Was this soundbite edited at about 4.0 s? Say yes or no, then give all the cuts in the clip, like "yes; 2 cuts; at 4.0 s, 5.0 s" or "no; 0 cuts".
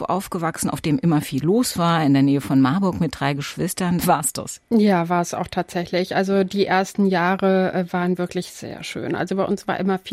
yes; 1 cut; at 4.0 s